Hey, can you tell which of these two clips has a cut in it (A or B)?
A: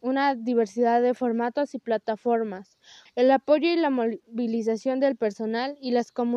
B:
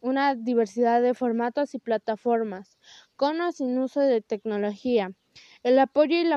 A